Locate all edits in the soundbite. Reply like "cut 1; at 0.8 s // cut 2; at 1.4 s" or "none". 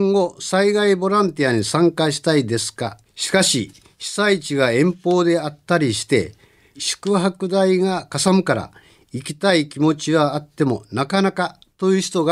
cut 1; at 3.1 s // cut 2; at 6.7 s